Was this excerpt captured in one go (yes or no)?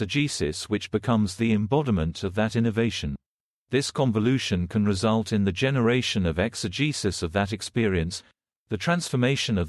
no